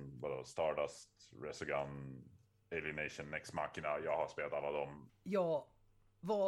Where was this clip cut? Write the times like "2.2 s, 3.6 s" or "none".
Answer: 5.1 s